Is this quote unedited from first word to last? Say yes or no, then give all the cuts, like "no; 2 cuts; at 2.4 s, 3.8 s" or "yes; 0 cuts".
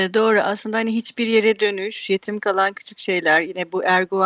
yes; 0 cuts